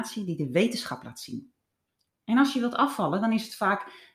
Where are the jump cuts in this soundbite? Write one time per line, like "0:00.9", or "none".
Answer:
0:02.1